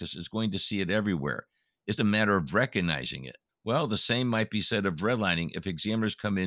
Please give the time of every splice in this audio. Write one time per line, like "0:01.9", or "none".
0:02.0
0:03.5